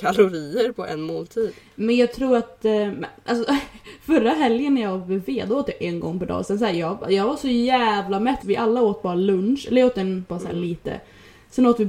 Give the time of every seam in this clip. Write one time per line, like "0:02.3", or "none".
0:08.4
0:10.3